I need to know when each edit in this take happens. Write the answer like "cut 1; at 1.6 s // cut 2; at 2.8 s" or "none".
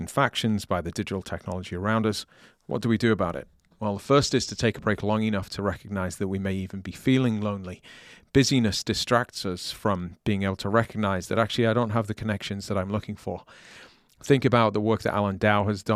none